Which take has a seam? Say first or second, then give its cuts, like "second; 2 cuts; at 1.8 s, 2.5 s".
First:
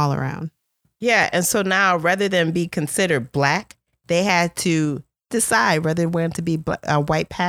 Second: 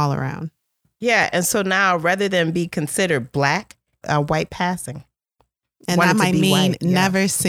second; 1 cut; at 4.0 s